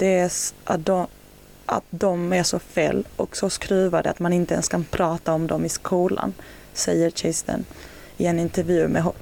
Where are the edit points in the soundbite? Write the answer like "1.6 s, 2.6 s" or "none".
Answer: none